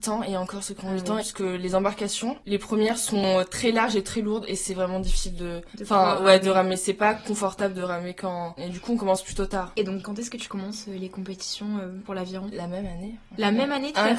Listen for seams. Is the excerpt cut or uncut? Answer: cut